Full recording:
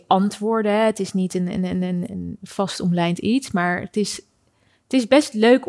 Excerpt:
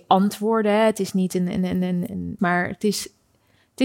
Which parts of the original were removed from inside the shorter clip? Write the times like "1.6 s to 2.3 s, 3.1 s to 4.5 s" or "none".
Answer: 2.4 s to 3.5 s